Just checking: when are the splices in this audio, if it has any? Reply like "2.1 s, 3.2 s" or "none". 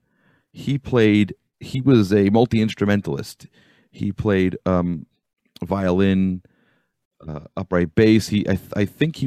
none

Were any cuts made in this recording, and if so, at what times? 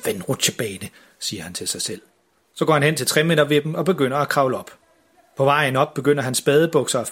none

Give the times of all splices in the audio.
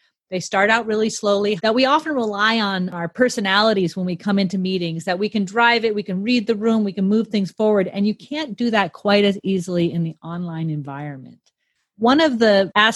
1.6 s

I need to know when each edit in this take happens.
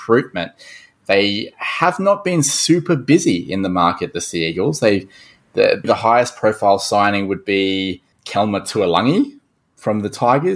5.8 s, 8.1 s

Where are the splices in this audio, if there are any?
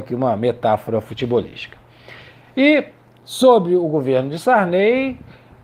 none

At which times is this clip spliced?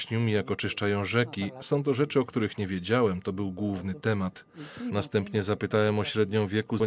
none

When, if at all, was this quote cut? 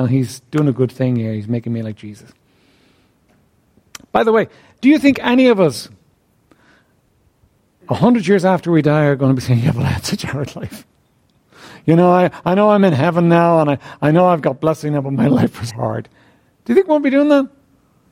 15.7 s

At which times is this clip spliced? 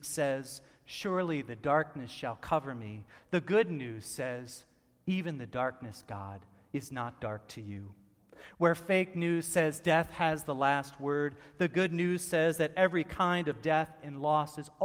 none

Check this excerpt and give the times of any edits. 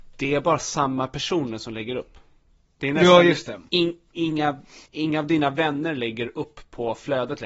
3.7 s, 4.9 s

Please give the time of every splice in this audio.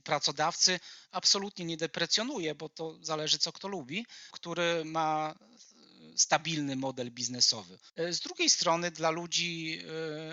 4.3 s, 7.9 s

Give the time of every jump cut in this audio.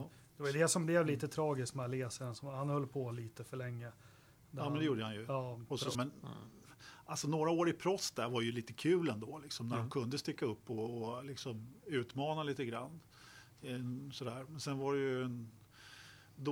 5.9 s

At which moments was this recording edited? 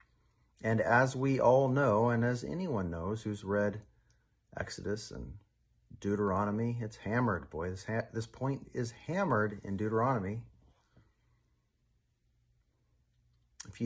none

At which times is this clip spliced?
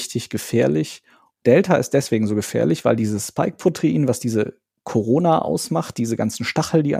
1.3 s

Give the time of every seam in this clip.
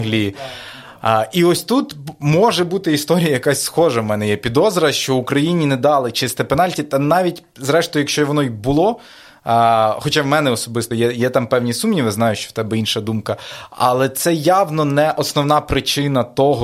none

